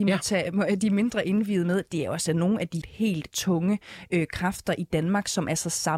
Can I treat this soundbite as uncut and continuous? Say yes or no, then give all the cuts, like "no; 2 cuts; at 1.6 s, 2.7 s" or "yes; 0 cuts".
no; 1 cut; at 2.8 s